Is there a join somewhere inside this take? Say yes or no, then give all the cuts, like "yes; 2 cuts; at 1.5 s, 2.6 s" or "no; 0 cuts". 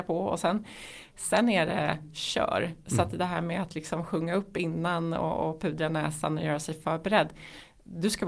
no; 0 cuts